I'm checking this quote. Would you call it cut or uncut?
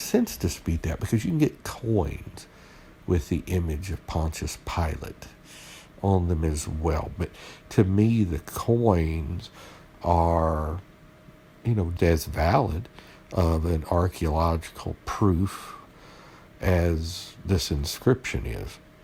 cut